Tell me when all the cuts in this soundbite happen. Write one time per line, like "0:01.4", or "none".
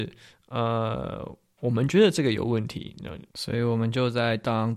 0:03.3